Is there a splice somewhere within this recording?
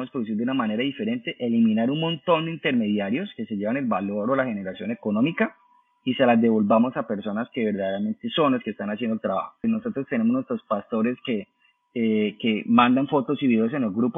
yes; 1 cut; at 9.6 s

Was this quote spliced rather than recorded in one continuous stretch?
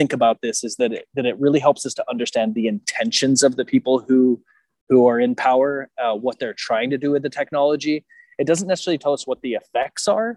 no; 0 cuts

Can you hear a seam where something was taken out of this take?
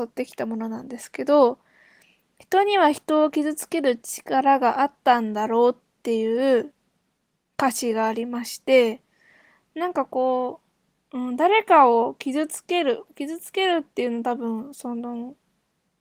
no; 0 cuts

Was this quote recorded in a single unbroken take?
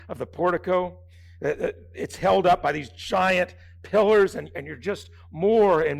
yes; 0 cuts

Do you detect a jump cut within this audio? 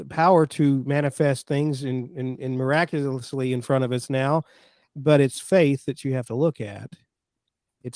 no; 0 cuts

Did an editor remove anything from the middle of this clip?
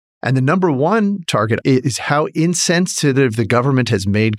yes; 1 cut; at 1.6 s

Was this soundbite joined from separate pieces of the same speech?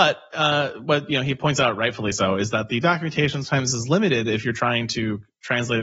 no; 0 cuts

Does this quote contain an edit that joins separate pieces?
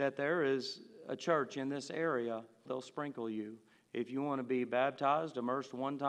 yes; 1 cut; at 2.7 s

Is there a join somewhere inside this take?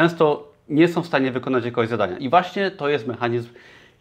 no; 0 cuts

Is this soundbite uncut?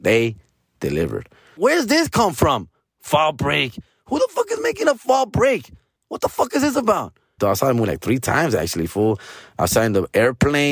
no; 3 cuts; at 1.6 s, 6.0 s, 7.4 s

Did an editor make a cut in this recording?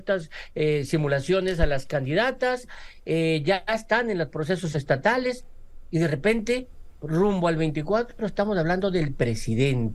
no; 0 cuts

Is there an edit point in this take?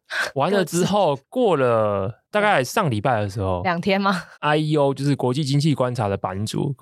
yes; 1 cut; at 4.4 s

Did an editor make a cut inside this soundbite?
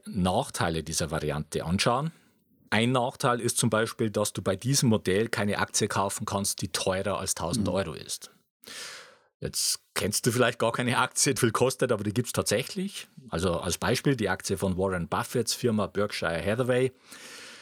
yes; 1 cut; at 11.4 s

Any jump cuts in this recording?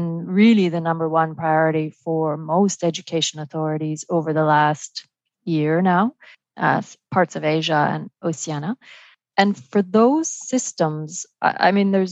yes; 1 cut; at 6.4 s

